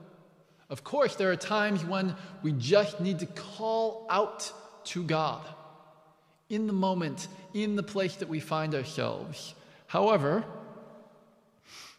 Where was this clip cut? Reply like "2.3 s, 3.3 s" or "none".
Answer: none